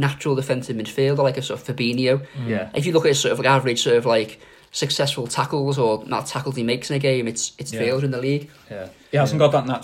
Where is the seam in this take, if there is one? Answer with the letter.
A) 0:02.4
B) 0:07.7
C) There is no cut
B